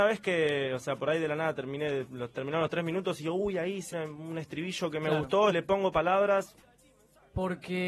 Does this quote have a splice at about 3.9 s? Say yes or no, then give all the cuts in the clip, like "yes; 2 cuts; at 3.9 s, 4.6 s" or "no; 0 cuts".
yes; 2 cuts; at 3.9 s, 5.5 s